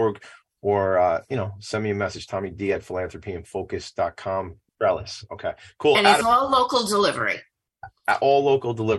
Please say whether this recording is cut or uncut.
cut